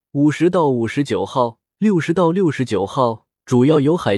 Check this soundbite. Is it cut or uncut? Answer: cut